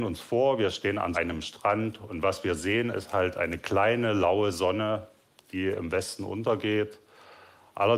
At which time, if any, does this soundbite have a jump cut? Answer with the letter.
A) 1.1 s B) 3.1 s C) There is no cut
A